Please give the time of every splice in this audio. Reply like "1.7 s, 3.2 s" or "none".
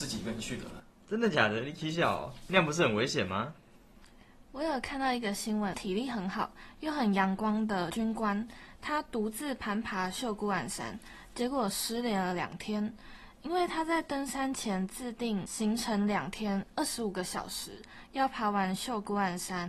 5.7 s